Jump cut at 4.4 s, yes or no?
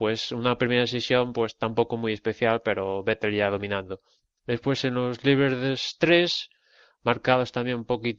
yes